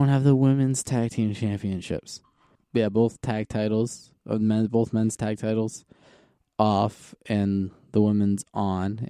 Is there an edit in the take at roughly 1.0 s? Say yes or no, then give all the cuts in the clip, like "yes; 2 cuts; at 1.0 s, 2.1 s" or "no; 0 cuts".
no; 1 cut; at 2.5 s